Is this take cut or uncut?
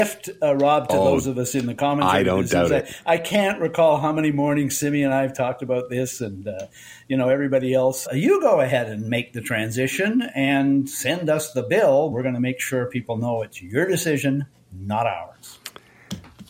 cut